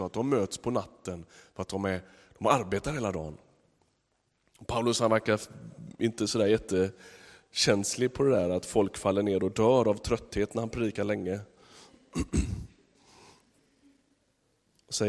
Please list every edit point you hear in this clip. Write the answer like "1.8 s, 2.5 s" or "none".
none